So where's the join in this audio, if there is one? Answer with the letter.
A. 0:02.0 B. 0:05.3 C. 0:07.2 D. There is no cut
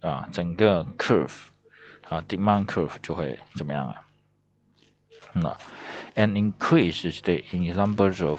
B